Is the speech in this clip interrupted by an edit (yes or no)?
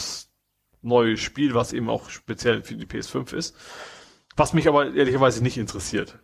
no